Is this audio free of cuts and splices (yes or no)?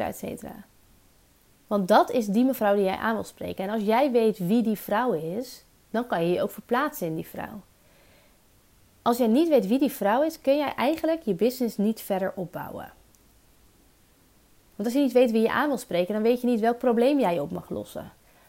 yes